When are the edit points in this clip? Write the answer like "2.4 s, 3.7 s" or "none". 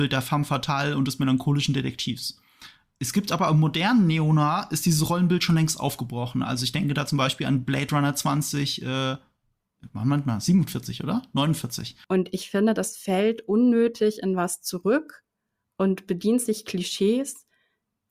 12.0 s